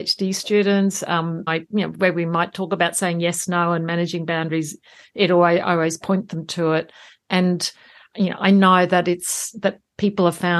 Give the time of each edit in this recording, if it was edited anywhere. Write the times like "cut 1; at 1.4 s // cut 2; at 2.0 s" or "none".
cut 1; at 1.5 s